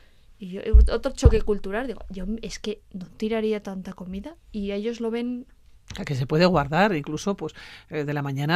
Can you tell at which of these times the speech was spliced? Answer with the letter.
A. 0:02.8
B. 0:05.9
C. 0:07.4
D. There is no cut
A